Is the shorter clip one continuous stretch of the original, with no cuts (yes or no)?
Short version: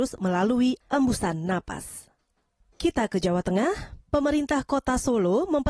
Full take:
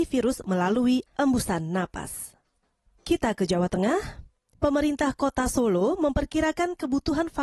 no